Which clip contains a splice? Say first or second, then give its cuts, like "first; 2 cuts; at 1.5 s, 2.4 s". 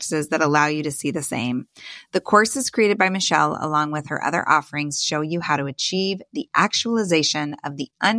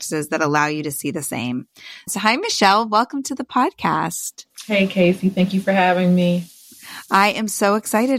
second; 1 cut; at 2.1 s